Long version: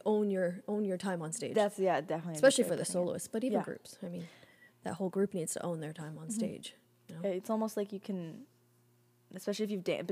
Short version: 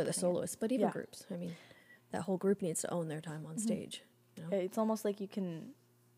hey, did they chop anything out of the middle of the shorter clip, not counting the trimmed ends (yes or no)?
no